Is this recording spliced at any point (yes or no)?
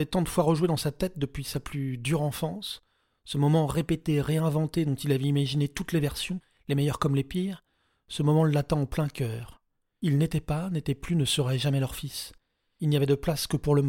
no